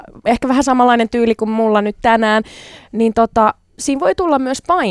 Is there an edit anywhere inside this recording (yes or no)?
no